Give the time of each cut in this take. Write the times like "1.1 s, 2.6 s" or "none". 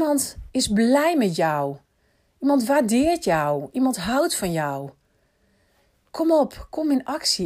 none